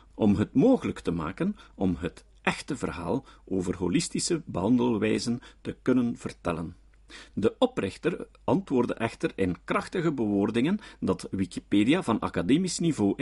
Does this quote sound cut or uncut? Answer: uncut